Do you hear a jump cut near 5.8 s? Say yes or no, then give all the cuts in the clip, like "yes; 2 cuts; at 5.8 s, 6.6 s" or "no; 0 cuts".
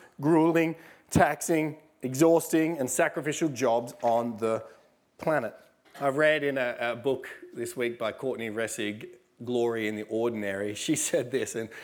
yes; 1 cut; at 5.8 s